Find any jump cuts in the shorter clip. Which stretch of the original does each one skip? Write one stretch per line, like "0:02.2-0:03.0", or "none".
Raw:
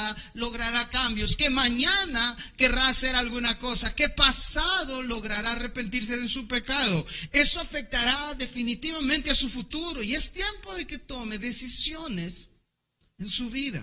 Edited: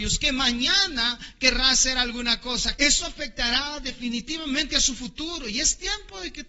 0:03.9-0:07.3